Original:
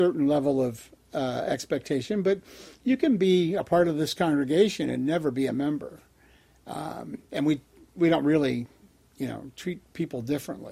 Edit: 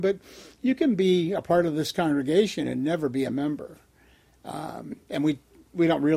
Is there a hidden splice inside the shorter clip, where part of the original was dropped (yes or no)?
no